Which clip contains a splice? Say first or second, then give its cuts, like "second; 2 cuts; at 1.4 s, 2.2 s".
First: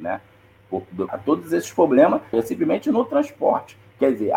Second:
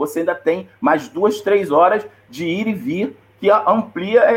first; 2 cuts; at 1.1 s, 2.3 s